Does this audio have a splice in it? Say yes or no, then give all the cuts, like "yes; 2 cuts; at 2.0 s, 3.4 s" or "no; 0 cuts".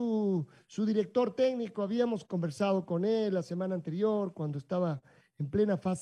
no; 0 cuts